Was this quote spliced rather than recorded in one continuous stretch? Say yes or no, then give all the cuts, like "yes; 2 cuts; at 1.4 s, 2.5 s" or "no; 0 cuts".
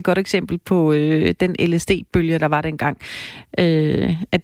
no; 0 cuts